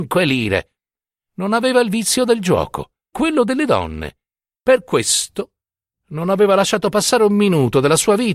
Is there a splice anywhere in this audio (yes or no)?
yes